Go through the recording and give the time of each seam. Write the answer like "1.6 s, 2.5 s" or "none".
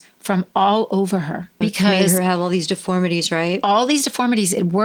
1.6 s